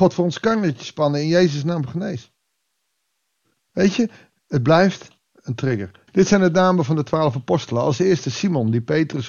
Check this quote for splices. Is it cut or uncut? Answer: cut